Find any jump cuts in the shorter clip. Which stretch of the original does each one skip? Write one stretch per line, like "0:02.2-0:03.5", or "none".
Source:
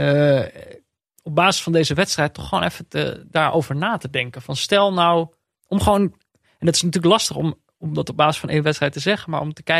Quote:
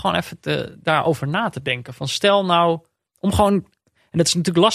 none